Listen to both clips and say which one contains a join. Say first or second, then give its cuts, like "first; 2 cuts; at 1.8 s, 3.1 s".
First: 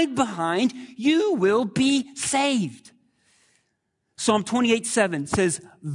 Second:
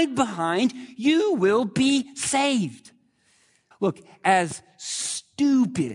second; 1 cut; at 3.7 s